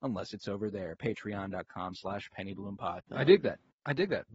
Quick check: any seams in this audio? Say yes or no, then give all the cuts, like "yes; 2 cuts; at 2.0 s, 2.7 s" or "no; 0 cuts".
yes; 1 cut; at 3.0 s